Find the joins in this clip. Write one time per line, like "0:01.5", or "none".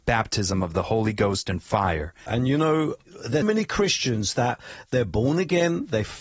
0:02.3
0:03.4